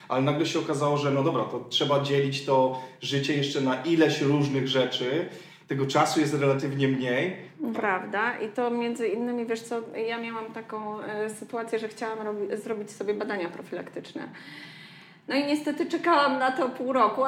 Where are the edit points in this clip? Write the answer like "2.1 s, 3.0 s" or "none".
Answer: 7.7 s